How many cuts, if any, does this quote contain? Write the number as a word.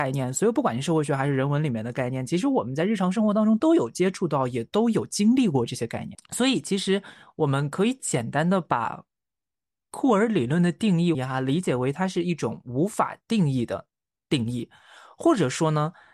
two